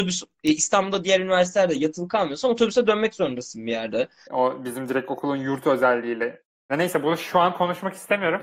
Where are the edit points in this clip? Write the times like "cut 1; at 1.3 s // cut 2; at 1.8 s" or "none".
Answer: cut 1; at 4.2 s // cut 2; at 6.7 s